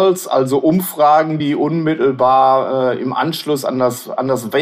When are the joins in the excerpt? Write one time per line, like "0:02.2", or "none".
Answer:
none

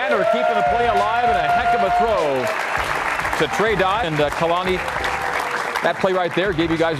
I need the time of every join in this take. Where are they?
0:04.0

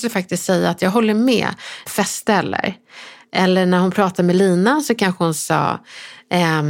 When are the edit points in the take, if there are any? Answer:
0:01.9

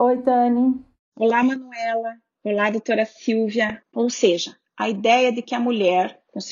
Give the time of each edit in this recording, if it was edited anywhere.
0:03.8

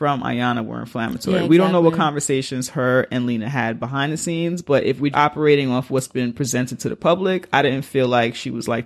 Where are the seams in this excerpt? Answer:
0:05.1

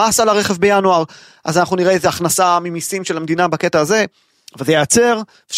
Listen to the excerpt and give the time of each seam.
none

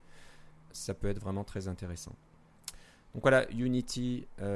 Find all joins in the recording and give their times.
none

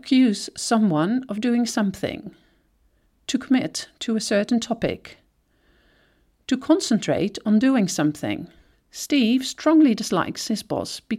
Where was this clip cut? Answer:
0:08.7

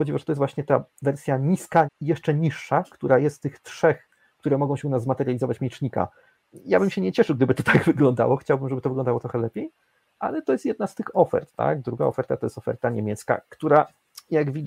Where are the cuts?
0:01.8

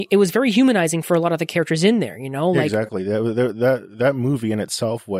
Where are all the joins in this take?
none

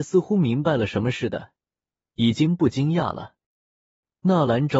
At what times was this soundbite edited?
none

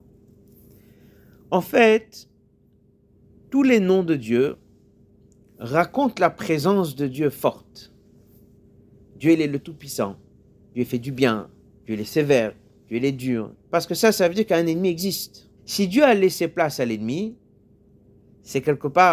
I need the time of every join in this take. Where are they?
0:13.5
0:15.6

